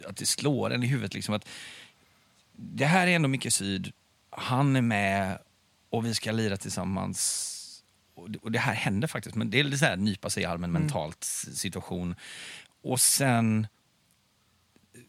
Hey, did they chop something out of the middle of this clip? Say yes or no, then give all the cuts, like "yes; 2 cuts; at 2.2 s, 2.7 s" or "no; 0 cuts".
no; 0 cuts